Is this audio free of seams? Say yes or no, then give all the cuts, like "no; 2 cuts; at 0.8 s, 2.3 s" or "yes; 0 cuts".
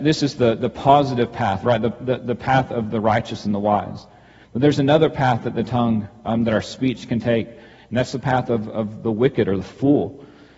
yes; 0 cuts